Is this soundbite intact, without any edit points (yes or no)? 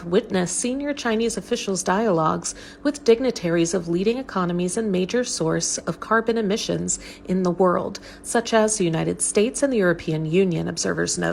yes